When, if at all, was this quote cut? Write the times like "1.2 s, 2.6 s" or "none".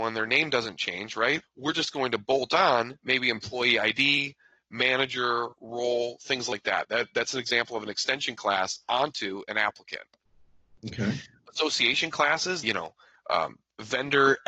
1.4 s, 12.6 s

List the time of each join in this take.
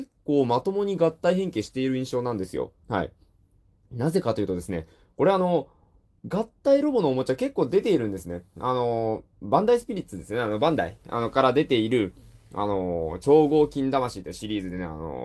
none

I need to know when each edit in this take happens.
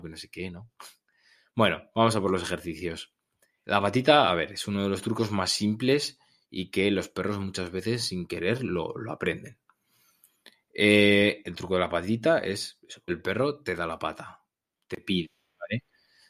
3.6 s, 13.1 s

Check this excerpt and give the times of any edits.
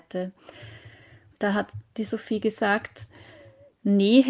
1.3 s

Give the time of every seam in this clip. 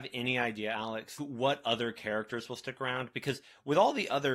1.2 s

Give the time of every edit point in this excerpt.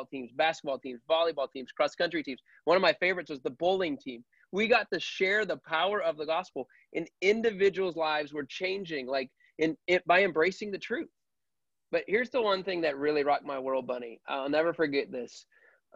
none

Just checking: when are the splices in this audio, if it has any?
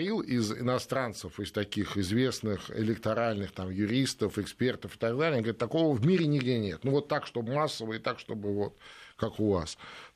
none

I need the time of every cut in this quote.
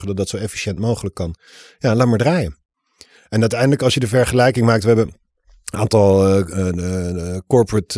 none

